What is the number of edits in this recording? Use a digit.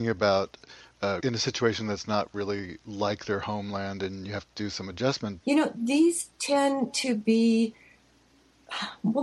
2